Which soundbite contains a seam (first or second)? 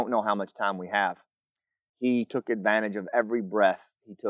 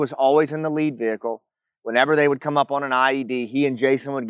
first